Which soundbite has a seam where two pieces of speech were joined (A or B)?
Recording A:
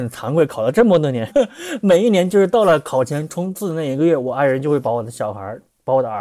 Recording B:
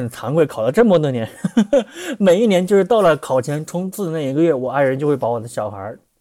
A